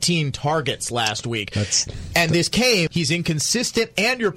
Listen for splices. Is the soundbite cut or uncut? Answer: cut